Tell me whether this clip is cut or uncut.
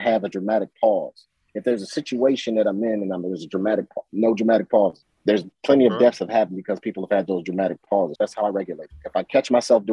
cut